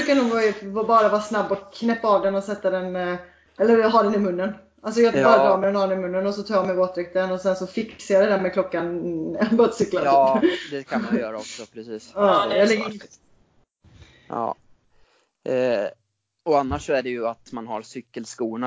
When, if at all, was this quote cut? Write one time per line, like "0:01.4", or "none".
none